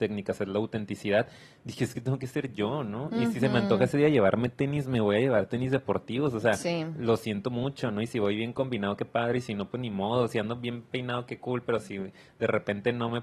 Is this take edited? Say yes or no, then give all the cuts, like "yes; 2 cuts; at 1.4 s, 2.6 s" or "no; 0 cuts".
no; 0 cuts